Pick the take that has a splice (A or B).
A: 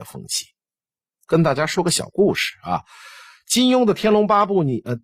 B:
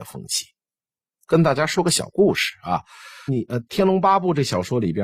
B